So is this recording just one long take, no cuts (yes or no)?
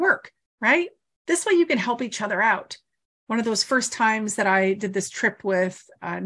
yes